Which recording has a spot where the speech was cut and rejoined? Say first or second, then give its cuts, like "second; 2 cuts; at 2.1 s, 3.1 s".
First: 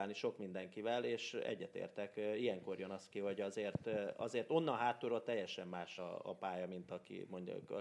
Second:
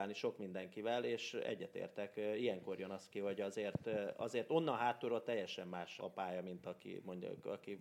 second; 1 cut; at 6.0 s